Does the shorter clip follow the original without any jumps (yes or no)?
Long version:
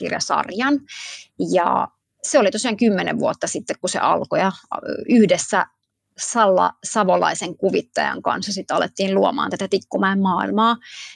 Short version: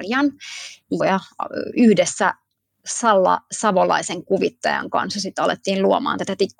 no